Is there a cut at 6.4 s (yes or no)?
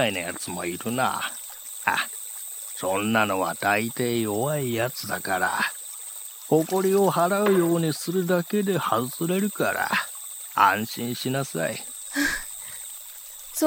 no